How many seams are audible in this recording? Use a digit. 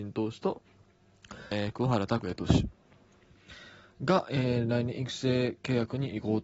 1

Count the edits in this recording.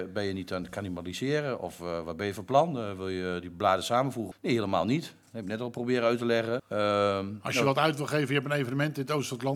2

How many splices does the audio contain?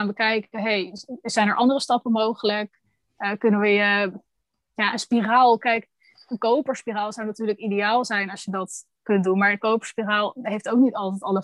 0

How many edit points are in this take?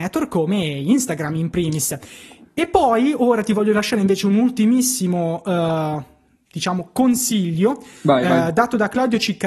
0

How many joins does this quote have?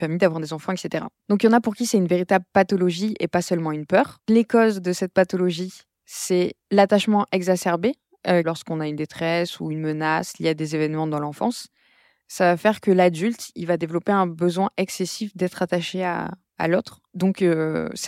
1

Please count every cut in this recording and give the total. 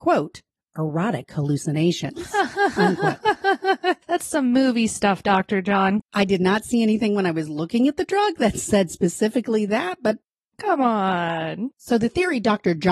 1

